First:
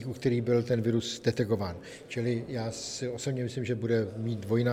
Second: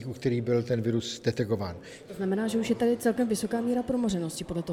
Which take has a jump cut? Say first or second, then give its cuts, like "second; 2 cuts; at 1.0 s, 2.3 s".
second; 1 cut; at 2.1 s